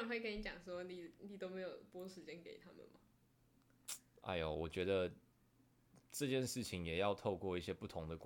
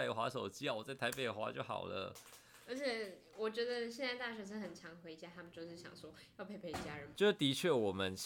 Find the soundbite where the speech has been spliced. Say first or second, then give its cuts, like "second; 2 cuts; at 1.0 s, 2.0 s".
second; 1 cut; at 7.1 s